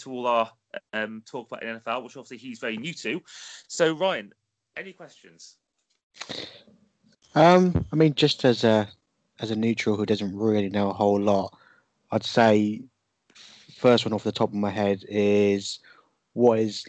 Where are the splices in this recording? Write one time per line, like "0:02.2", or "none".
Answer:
none